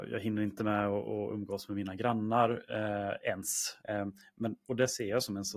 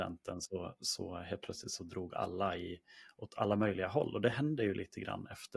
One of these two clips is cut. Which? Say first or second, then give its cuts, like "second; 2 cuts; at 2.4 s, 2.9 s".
first; 1 cut; at 3.8 s